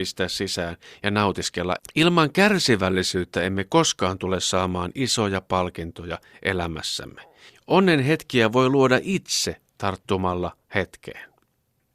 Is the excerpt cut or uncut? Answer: cut